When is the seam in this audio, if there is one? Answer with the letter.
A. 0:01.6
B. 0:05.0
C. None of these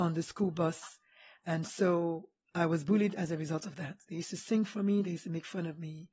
C